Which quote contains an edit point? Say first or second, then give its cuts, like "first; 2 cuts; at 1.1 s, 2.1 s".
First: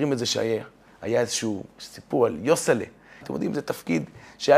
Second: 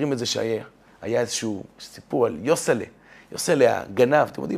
first; 1 cut; at 3.2 s